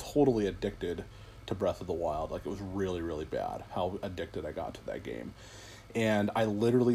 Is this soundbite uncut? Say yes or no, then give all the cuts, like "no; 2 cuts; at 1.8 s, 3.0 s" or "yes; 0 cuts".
yes; 0 cuts